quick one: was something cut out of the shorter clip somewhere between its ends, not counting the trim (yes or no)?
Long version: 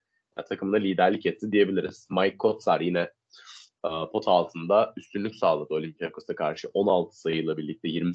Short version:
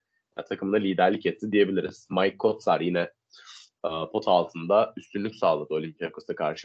no